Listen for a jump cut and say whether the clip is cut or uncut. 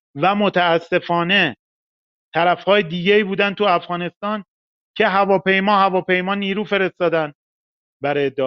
uncut